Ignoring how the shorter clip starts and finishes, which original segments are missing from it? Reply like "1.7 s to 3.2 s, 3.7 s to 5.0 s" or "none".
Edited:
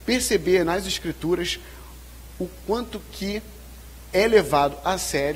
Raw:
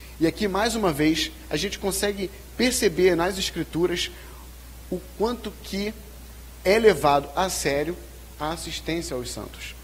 none